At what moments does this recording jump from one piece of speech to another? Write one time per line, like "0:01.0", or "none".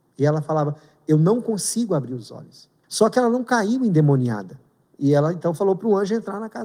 0:02.8
0:04.8

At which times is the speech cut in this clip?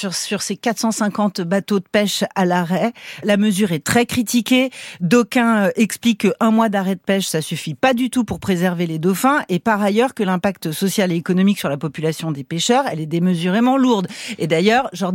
0:03.2

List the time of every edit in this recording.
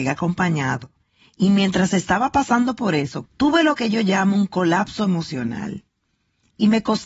0:03.3

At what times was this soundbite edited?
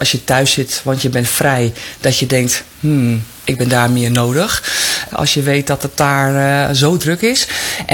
0:05.1

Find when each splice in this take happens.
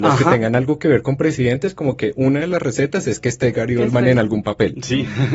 none

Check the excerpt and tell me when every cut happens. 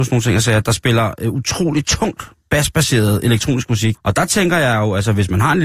0:03.9

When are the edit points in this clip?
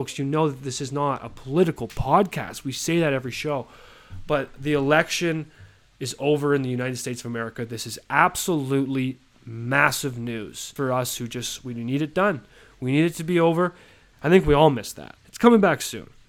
0:10.8
0:14.1
0:15.2

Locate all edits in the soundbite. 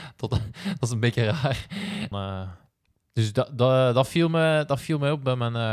0:02.1

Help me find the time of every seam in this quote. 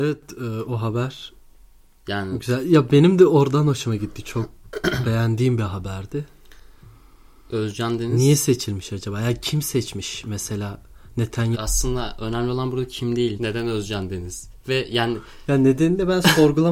0:11.5
0:13.4

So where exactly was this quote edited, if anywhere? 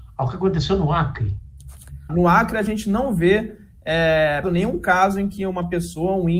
0:02.1
0:04.4

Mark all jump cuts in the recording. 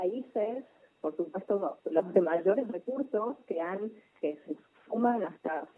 0:04.1

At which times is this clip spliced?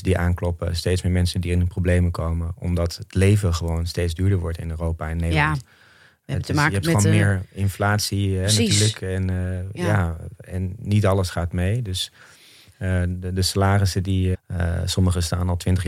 0:14.3

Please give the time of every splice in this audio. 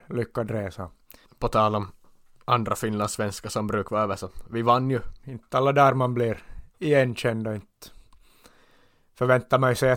0:01.2
0:05.2
0:06.7

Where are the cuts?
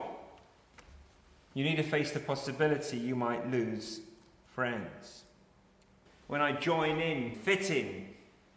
0:06.1
0:07.3

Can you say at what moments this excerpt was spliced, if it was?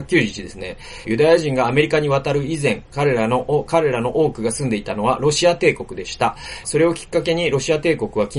0:01.0
0:06.6

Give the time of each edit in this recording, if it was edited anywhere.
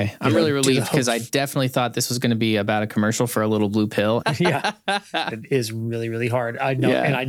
0:04.2
0:05.3

